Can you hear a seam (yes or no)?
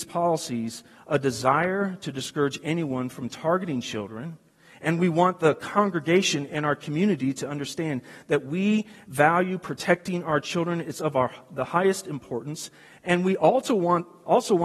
no